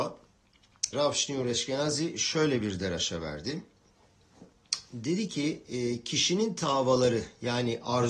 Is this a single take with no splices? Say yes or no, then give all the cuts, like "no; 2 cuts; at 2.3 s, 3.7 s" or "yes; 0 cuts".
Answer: no; 1 cut; at 0.9 s